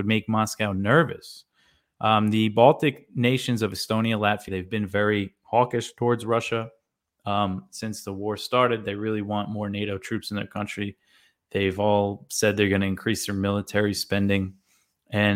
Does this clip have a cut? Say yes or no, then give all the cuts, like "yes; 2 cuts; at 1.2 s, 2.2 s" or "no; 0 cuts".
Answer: yes; 1 cut; at 4.5 s